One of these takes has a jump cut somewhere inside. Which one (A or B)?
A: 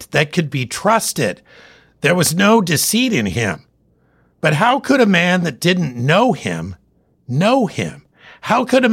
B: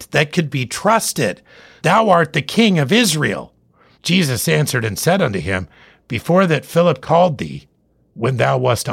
B